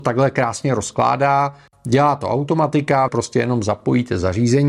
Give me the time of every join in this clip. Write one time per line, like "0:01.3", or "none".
0:03.1